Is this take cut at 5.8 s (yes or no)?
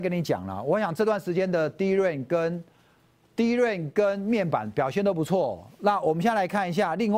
no